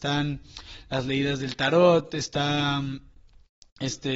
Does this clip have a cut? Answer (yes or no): no